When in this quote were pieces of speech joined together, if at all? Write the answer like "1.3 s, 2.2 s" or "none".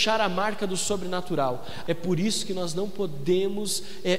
1.8 s